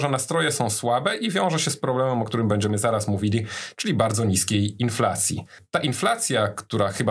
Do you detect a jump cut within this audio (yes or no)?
no